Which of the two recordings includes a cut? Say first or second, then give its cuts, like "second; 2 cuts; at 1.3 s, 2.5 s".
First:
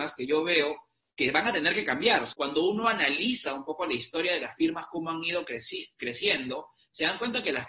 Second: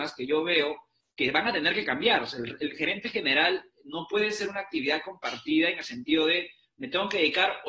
first; 1 cut; at 2.3 s